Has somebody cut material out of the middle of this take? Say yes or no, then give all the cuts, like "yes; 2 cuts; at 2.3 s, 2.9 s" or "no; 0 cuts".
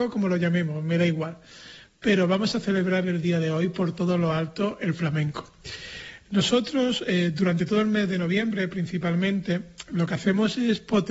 no; 0 cuts